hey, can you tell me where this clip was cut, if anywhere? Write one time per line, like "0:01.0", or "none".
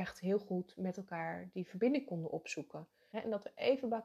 0:03.1